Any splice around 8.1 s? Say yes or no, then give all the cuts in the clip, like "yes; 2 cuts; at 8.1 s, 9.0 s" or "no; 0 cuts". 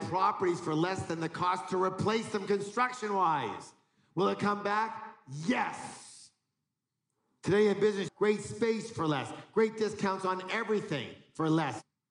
yes; 1 cut; at 8.1 s